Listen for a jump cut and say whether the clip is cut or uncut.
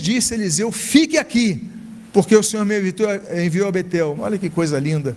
cut